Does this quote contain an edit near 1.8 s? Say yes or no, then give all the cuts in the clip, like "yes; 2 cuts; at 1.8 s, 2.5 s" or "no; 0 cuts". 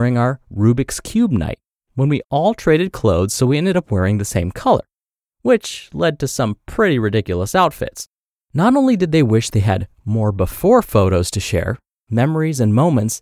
no; 2 cuts; at 8.4 s, 12.0 s